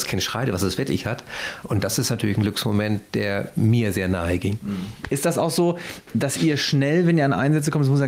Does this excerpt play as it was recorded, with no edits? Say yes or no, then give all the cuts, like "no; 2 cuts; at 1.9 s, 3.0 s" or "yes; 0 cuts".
no; 1 cut; at 1.6 s